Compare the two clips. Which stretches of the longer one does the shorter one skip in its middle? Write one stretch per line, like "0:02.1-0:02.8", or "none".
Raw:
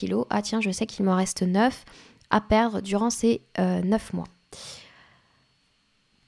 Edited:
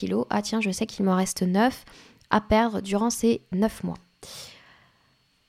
0:03.5-0:03.8